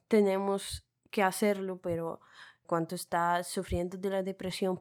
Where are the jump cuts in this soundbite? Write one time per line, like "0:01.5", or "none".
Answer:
0:02.6